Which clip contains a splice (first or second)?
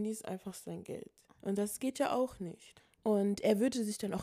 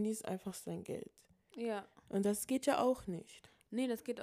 first